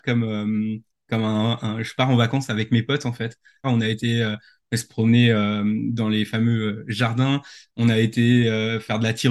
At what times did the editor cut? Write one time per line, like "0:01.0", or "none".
0:03.6